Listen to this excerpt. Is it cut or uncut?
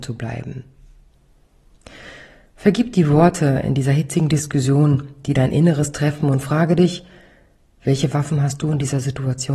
uncut